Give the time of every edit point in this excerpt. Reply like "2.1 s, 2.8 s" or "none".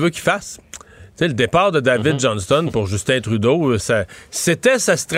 3.8 s